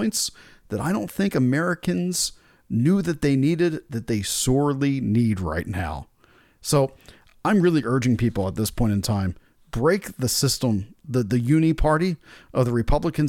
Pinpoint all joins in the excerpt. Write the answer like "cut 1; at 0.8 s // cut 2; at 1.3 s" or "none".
none